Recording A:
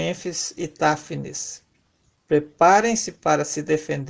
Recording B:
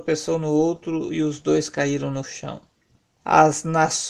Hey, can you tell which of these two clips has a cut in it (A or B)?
B